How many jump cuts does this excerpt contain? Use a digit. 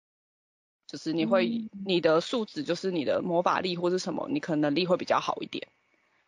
0